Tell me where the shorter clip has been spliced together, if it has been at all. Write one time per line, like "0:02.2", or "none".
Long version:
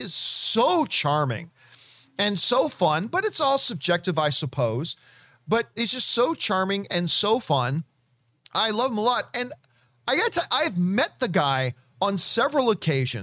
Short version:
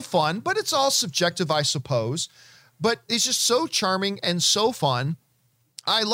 none